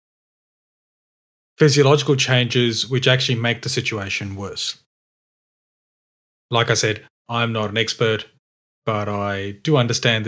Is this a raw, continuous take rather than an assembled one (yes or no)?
yes